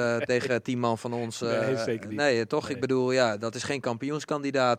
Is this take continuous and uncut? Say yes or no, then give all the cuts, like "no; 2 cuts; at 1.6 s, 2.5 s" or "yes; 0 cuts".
yes; 0 cuts